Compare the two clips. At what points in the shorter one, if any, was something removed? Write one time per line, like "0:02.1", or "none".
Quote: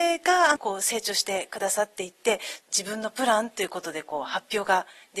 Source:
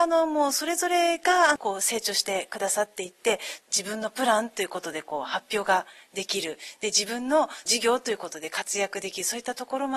none